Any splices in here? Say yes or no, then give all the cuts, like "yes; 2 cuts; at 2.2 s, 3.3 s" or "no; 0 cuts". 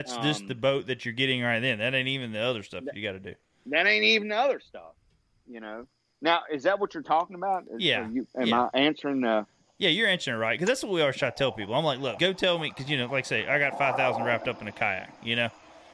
yes; 1 cut; at 12.2 s